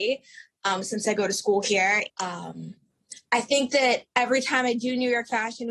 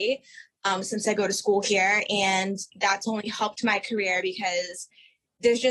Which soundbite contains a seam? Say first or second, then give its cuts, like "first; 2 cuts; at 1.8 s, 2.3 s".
first; 1 cut; at 2.1 s